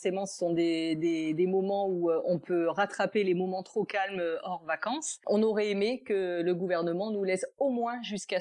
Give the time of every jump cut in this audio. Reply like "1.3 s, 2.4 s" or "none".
none